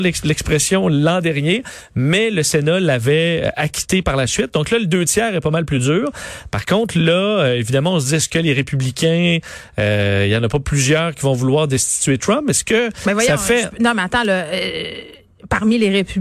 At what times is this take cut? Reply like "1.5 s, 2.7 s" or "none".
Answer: none